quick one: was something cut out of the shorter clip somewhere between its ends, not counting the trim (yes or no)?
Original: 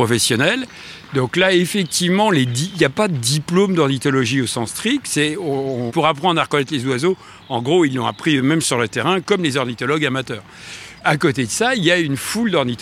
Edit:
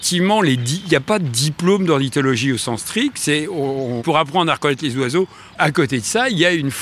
yes